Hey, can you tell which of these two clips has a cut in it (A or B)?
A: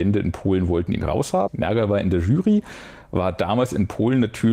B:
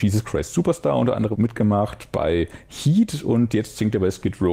A